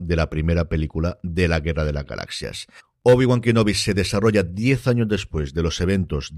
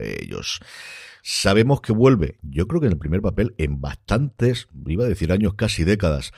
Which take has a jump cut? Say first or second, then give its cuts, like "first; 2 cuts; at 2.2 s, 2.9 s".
second; 1 cut; at 1.2 s